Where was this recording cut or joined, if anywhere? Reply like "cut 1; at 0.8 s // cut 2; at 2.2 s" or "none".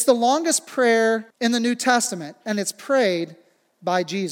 cut 1; at 1.3 s